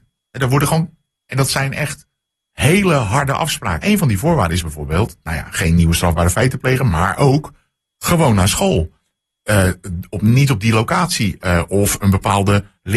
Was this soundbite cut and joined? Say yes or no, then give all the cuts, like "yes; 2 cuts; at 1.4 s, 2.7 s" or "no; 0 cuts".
yes; 1 cut; at 3.8 s